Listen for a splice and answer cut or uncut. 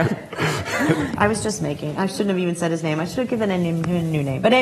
cut